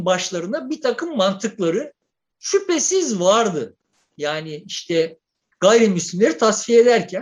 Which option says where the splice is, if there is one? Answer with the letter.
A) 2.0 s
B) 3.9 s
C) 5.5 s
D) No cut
D